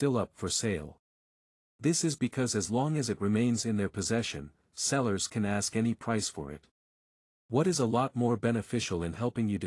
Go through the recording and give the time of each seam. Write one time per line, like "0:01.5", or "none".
none